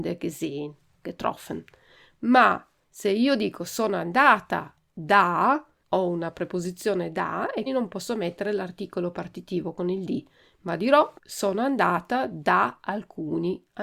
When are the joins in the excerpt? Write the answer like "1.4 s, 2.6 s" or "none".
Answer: 5.8 s, 7.7 s, 11.2 s